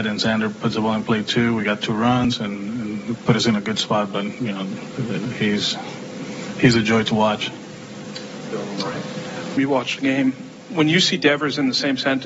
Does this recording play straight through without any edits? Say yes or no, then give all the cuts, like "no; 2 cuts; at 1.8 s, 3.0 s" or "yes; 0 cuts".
no; 1 cut; at 9.6 s